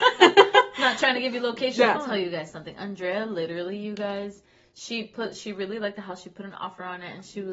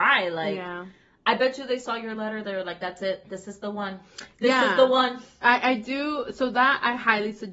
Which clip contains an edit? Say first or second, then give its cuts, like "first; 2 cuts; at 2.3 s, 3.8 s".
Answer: first; 1 cut; at 2.0 s